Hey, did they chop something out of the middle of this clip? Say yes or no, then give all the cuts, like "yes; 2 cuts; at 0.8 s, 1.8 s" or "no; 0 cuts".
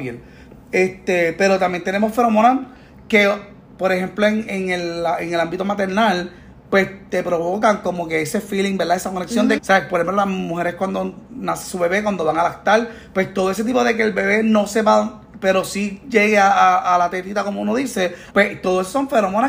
yes; 2 cuts; at 9.6 s, 18.3 s